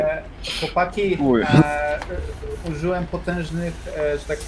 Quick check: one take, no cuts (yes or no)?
no